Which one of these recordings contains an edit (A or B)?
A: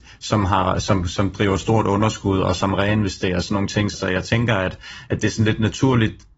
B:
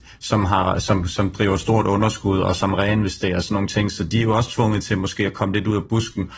A